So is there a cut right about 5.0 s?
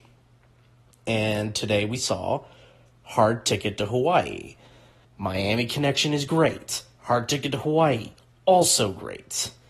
yes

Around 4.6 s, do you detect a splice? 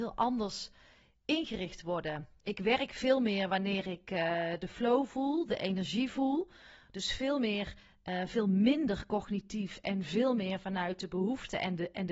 no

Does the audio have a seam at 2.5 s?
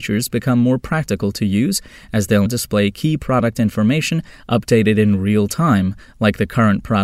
yes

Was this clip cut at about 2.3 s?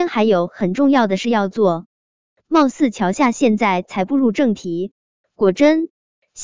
no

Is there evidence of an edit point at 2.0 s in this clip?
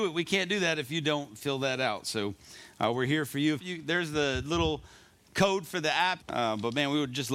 no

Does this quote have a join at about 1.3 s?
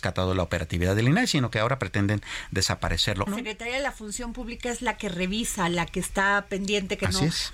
no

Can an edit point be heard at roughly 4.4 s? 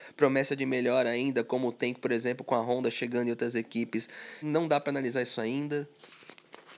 yes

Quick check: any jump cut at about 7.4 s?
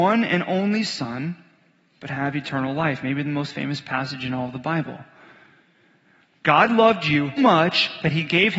yes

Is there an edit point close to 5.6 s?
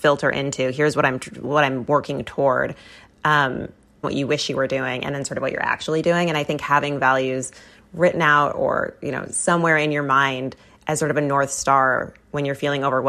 no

